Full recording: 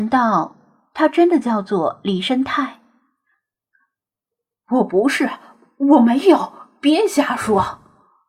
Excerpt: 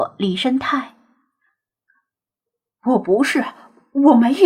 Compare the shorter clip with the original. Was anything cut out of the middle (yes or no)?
no